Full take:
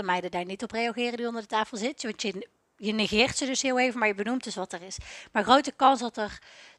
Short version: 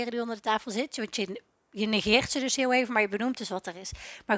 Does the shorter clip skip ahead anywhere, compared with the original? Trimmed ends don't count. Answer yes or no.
no